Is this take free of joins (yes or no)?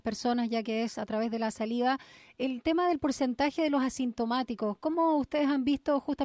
yes